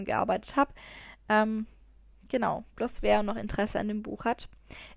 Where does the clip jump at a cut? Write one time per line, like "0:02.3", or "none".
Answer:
none